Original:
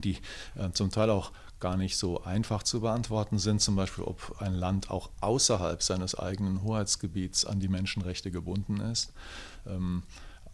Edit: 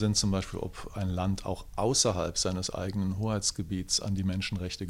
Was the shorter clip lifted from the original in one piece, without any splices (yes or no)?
yes